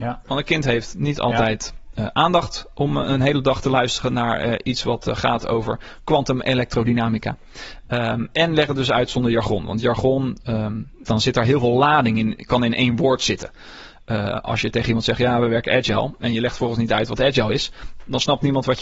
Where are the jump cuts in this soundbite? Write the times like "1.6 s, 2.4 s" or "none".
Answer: 11.0 s